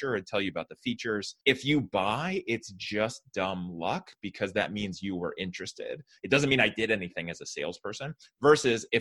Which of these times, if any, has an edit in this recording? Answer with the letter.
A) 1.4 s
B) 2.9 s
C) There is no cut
A